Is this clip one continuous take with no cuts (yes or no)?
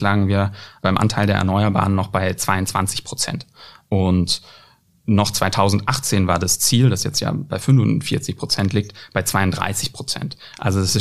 yes